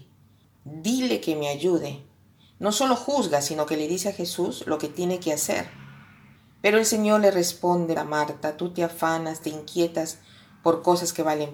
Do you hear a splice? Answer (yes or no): yes